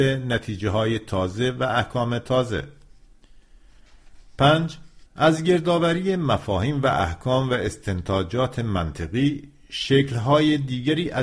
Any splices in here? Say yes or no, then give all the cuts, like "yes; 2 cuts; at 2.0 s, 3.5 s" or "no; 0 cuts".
yes; 1 cut; at 5.1 s